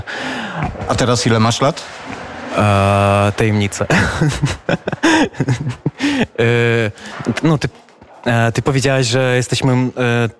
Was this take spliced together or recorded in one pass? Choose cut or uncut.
uncut